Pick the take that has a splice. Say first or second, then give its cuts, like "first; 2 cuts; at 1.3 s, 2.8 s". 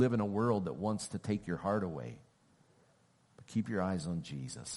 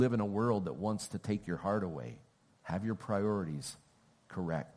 second; 1 cut; at 2.5 s